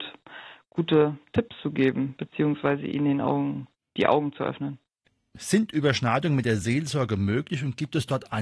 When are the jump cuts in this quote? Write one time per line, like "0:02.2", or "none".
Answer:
none